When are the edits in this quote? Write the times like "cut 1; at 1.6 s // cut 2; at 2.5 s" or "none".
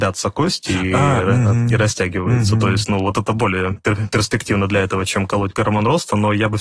none